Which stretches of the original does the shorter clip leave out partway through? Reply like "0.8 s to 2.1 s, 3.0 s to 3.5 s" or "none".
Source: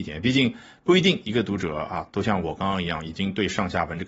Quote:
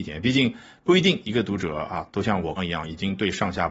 2.6 s to 2.7 s